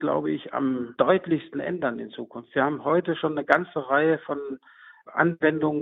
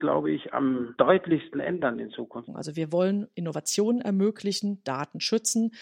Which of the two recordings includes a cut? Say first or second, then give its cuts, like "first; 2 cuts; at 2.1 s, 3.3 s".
second; 1 cut; at 2.5 s